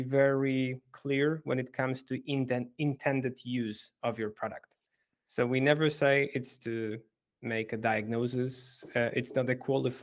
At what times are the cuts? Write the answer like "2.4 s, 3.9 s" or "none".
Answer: none